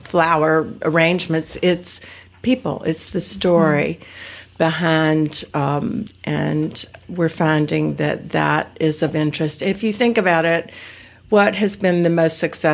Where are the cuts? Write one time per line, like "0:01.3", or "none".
0:06.0